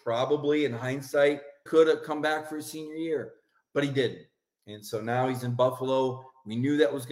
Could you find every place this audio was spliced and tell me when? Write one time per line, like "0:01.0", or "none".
0:01.7

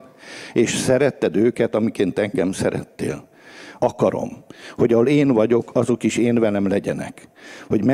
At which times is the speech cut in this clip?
0:03.8

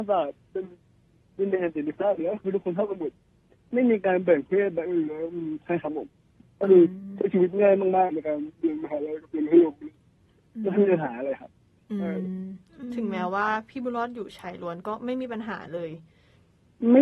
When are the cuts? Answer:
none

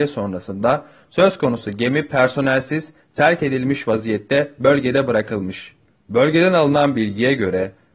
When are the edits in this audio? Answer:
0:05.9

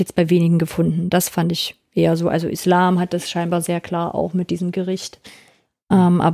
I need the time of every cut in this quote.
none

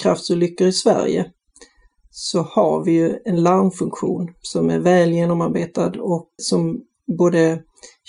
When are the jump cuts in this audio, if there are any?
0:06.4

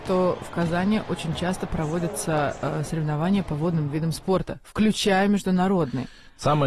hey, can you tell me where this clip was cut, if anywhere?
none

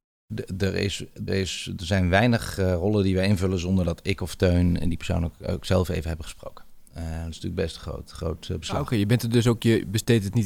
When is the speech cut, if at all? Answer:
0:01.3
0:06.9

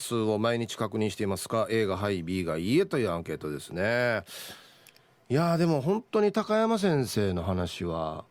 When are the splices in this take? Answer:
none

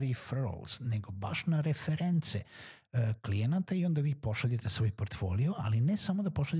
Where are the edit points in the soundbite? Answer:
none

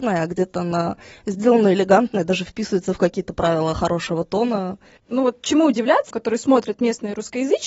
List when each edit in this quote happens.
0:05.0
0:06.1

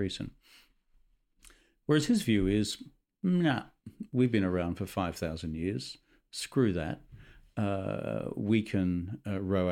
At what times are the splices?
none

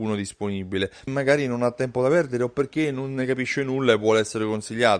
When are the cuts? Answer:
0:01.1

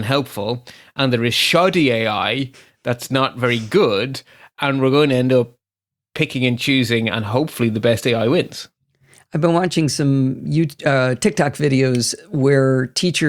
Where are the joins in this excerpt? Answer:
none

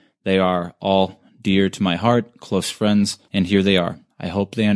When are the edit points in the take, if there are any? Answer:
0:03.3

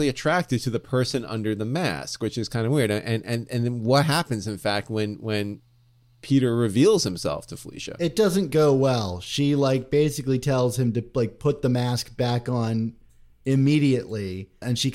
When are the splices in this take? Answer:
none

